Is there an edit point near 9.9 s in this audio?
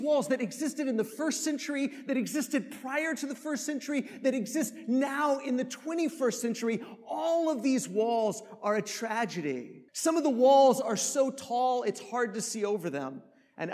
yes; 1 cut; at 9.9 s

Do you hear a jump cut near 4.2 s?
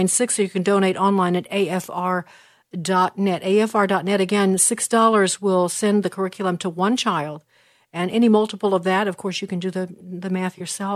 no; 0 cuts

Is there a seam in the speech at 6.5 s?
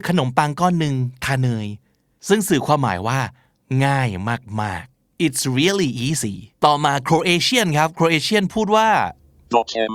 yes; 1 cut; at 6.5 s

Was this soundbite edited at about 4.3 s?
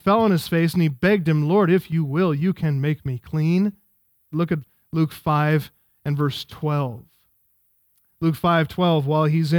yes; 1 cut; at 4.3 s

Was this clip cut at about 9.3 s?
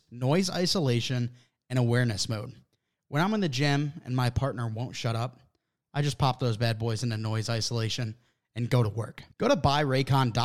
yes; 1 cut; at 9.3 s

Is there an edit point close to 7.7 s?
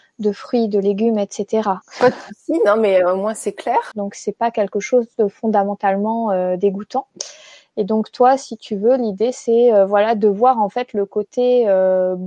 no; 2 cuts; at 1.8 s, 3.9 s

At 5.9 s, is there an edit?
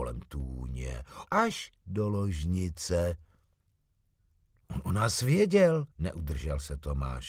yes; 2 cuts; at 1.3 s, 5.9 s

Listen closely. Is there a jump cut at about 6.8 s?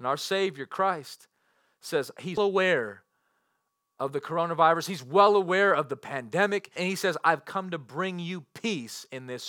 yes; 2 cuts; at 2.4 s, 6.8 s

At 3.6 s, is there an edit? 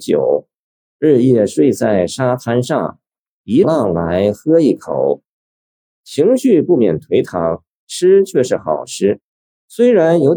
yes; 1 cut; at 3.6 s

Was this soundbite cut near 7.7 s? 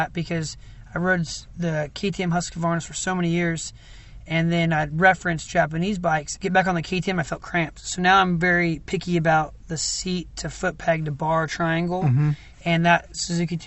no; 1 cut; at 6.4 s

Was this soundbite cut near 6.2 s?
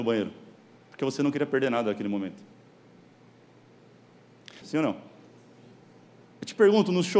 no; 1 cut; at 4.6 s

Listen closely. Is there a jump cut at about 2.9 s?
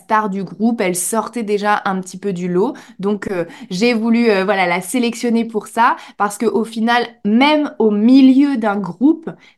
no; 0 cuts

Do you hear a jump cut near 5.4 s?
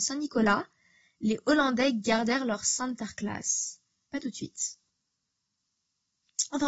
no; 1 cut; at 4.1 s

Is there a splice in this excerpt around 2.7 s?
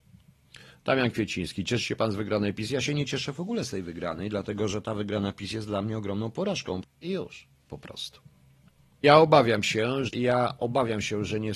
no; 3 cuts; at 6.8 s, 9.0 s, 10.1 s

